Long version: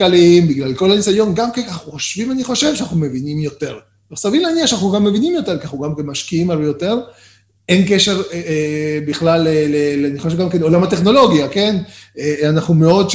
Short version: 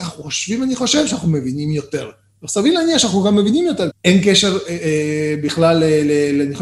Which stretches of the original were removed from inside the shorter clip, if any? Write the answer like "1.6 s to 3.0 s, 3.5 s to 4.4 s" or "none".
5.6 s to 7.5 s